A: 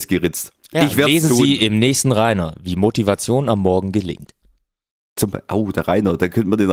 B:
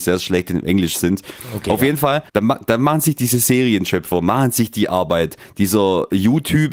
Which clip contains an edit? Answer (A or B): B